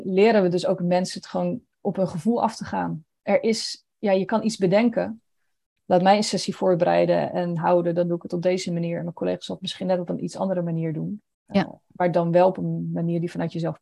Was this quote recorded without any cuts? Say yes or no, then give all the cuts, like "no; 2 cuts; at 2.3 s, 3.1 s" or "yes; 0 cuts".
yes; 0 cuts